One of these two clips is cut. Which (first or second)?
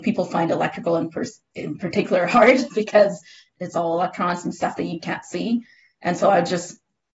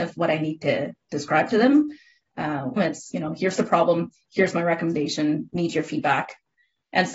second